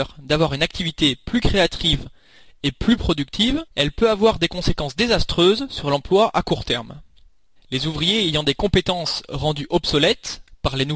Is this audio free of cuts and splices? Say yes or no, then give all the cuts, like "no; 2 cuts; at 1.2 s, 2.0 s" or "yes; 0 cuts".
no; 2 cuts; at 3.7 s, 7.6 s